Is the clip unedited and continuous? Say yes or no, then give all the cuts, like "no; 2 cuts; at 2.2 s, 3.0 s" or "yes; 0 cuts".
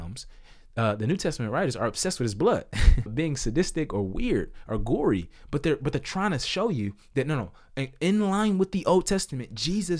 no; 1 cut; at 3.1 s